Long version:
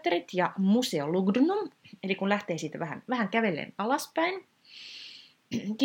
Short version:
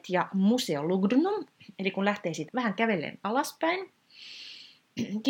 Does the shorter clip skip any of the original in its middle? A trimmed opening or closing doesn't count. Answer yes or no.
yes